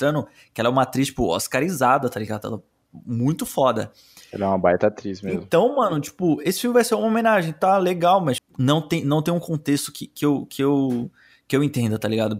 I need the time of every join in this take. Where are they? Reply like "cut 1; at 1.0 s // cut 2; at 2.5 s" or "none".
cut 1; at 8.4 s